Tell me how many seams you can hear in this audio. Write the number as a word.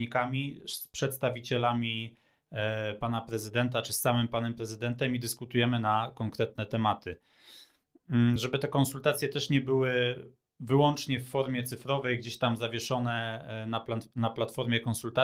zero